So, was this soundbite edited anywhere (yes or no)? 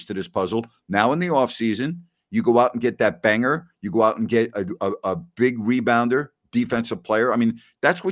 no